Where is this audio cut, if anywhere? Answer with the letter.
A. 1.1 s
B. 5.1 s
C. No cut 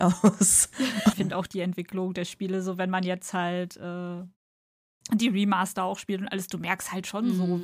A